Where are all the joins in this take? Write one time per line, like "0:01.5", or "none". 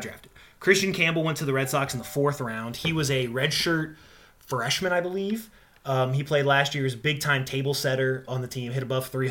0:08.3